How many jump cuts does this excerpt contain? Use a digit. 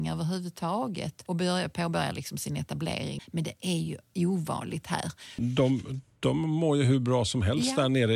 2